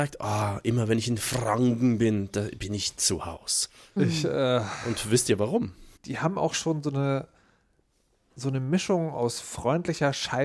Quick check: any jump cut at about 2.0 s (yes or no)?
no